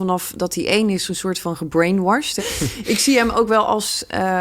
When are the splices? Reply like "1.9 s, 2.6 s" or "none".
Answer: 2.4 s